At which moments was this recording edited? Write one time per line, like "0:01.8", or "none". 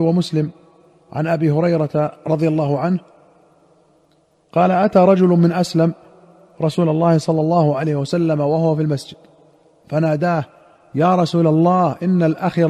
none